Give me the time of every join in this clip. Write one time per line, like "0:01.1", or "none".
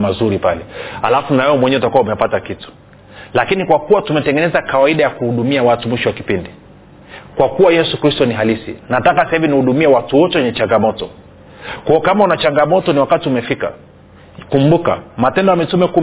none